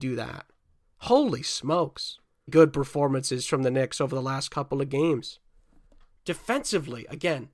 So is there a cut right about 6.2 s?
no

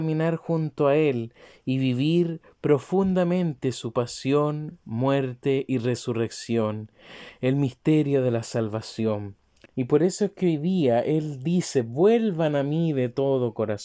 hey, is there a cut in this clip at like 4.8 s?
no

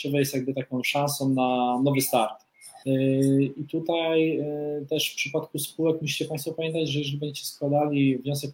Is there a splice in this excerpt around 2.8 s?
yes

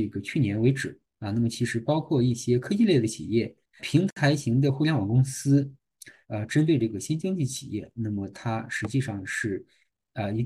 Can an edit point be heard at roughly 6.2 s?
yes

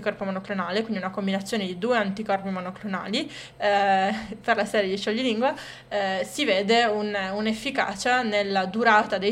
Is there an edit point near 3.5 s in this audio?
yes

